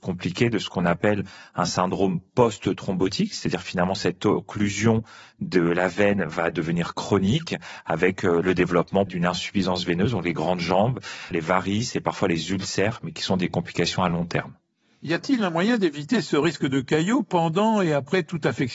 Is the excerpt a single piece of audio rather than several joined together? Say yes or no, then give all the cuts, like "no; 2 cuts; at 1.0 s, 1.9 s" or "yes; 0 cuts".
no; 2 cuts; at 9.1 s, 11.3 s